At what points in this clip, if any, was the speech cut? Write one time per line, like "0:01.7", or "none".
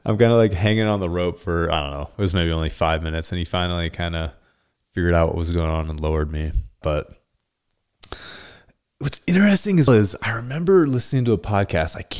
0:06.8
0:09.9